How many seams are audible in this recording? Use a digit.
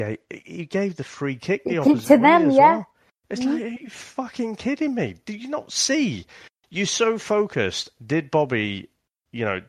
0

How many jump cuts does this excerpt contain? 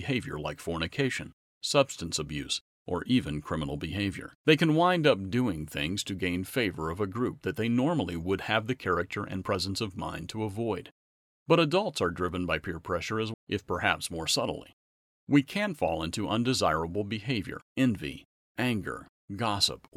3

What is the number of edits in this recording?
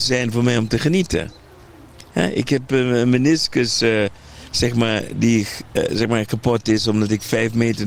0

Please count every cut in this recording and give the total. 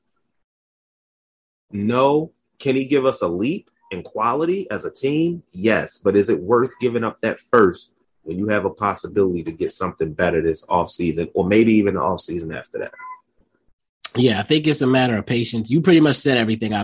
0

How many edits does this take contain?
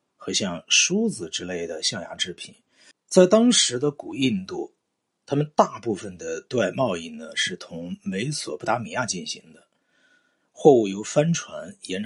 1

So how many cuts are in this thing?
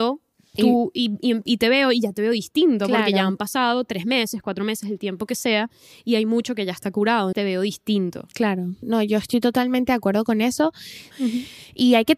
3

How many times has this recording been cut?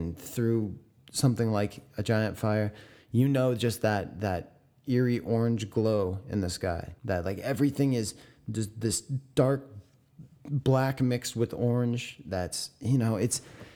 1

